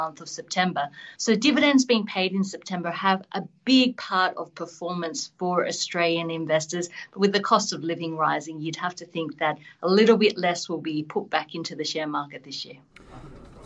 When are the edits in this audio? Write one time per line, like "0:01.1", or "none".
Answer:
0:01.2

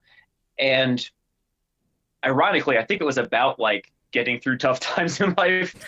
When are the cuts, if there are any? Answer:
none

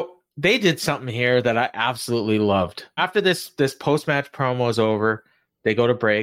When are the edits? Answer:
0:03.0

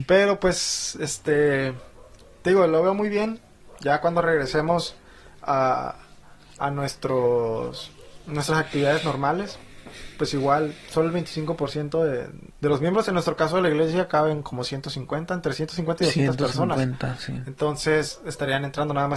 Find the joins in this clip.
0:12.5

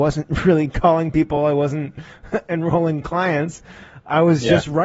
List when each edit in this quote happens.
none

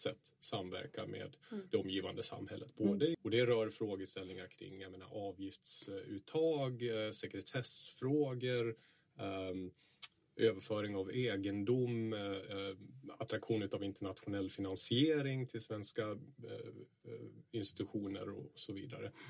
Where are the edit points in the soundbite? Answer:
0:03.1

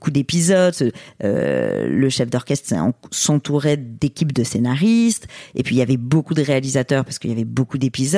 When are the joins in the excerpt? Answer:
none

